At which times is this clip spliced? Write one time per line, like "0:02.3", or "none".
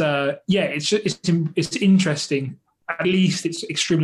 0:03.0